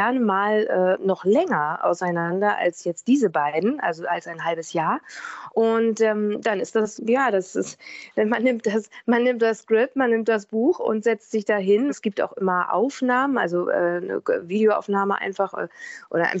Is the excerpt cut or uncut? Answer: cut